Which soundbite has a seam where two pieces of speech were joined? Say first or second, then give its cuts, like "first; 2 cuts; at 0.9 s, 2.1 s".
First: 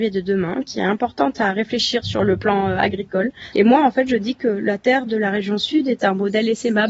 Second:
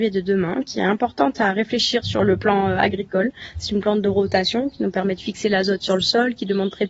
first; 1 cut; at 3.5 s